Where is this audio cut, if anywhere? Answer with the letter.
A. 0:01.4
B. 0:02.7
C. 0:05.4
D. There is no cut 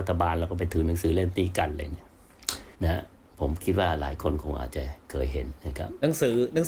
B